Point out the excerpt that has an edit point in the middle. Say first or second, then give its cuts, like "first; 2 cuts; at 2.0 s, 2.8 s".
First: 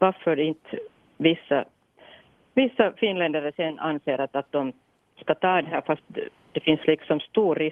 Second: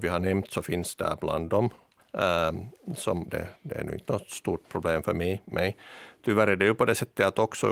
second; 2 cuts; at 2.0 s, 3.3 s